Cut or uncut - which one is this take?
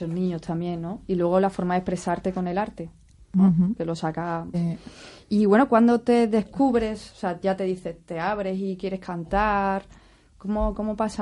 cut